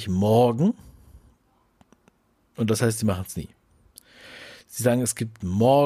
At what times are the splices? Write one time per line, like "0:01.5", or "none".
none